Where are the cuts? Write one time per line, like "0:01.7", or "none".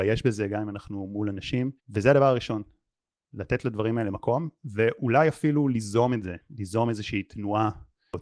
0:01.8